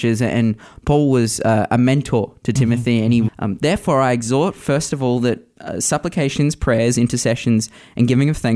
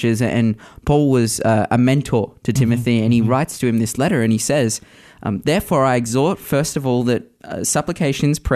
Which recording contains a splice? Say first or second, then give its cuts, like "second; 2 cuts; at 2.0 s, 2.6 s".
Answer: first; 1 cut; at 3.3 s